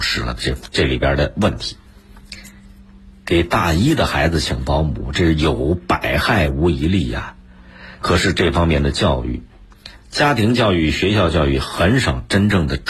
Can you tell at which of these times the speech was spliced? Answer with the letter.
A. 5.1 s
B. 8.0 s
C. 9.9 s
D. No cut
B